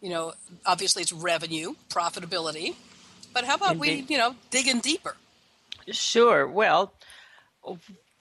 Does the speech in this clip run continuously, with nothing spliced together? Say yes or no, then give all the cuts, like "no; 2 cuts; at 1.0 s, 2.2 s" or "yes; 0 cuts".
yes; 0 cuts